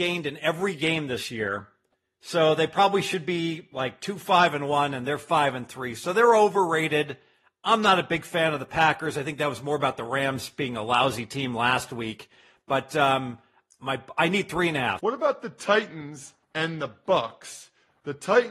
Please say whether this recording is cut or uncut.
cut